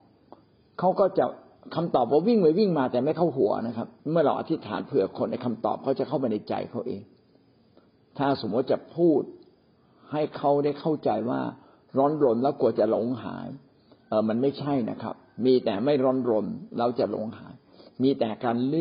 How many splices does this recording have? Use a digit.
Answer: 1